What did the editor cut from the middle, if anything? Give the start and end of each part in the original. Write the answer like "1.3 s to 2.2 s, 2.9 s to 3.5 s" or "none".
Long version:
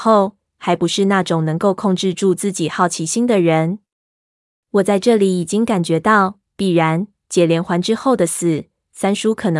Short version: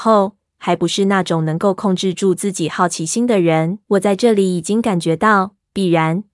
3.8 s to 4.7 s